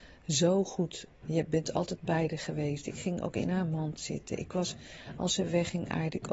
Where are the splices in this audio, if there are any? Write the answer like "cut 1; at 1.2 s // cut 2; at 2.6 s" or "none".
cut 1; at 1.1 s